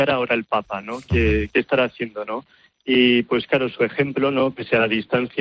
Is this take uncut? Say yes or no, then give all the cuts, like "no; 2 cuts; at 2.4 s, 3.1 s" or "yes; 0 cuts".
yes; 0 cuts